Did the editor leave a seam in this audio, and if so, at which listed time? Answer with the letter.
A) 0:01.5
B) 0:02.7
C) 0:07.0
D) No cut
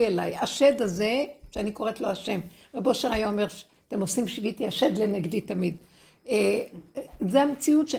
D